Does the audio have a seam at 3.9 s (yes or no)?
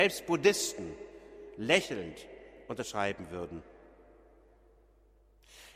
no